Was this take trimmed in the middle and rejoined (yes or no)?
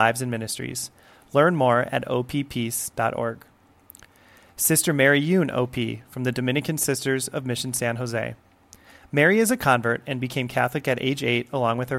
no